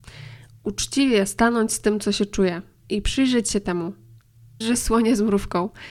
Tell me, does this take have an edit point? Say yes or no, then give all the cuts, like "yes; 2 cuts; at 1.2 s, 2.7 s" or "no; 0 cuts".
yes; 1 cut; at 4.6 s